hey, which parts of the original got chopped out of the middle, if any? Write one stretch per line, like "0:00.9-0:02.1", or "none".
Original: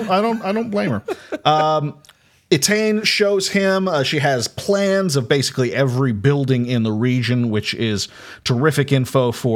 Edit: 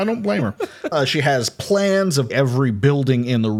0:01.4-0:03.9
0:05.3-0:05.7